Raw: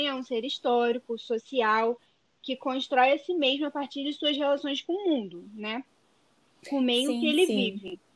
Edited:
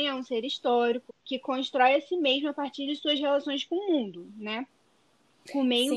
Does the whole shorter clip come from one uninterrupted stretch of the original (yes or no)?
no